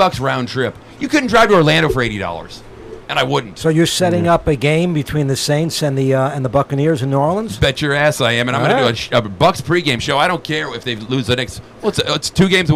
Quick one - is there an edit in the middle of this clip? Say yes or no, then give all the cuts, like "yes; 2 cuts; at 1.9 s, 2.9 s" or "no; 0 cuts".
no; 0 cuts